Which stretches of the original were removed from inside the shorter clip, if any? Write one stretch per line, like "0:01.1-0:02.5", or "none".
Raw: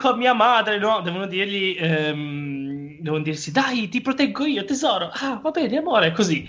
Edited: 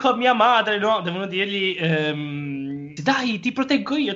0:03.0-0:03.5

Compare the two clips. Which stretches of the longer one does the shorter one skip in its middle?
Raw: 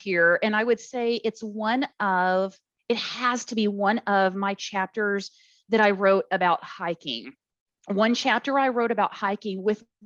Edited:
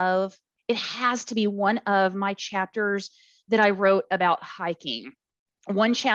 none

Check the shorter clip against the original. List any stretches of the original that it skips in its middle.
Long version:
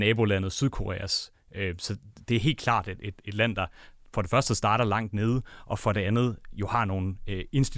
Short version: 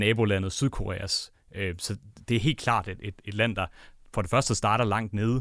none

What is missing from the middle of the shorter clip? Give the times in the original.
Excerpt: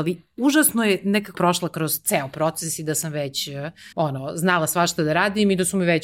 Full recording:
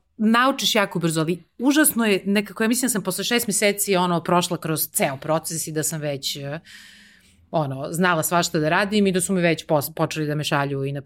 0:02.6-0:04.2
0:06.8-0:07.5

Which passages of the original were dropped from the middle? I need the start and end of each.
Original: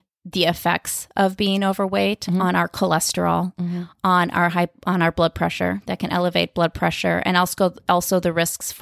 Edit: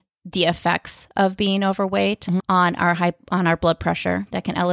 0:02.4-0:03.9

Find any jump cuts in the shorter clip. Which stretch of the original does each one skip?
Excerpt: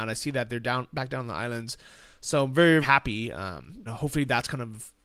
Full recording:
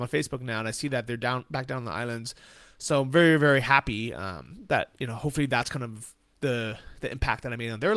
0:03.4-0:03.6
0:04.7-0:05.1

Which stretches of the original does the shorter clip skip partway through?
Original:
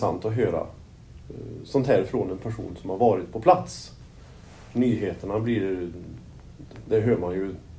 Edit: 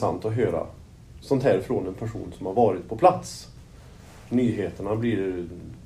0:01.2-0:01.6

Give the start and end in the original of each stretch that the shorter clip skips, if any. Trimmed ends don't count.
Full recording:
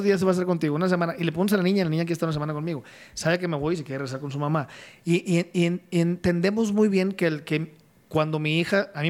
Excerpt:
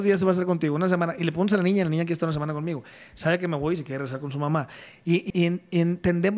0:05.3-0:05.5

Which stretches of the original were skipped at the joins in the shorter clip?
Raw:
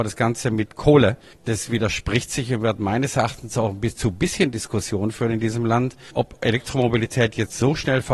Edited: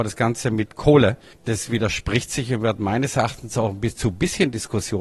none

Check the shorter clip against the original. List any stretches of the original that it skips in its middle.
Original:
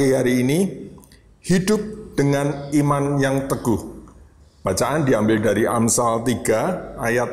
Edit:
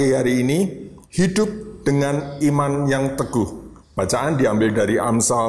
0:01.0-0:01.4
0:04.1-0:04.5

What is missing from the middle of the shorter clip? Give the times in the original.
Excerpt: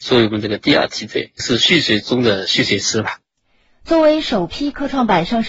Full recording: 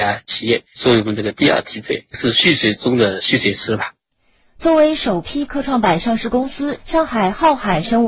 none

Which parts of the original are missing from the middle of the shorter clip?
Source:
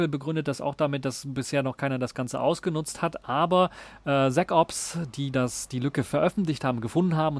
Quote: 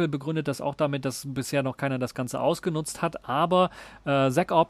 none

